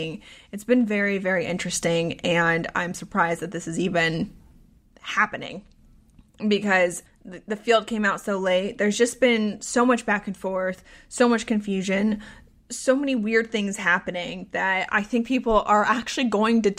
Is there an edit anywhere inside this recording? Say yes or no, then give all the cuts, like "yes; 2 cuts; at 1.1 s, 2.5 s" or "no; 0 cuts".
no; 0 cuts